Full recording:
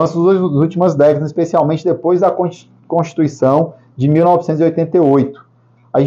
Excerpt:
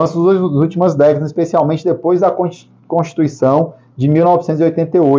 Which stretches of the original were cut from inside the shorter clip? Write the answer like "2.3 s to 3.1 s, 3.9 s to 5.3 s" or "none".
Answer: none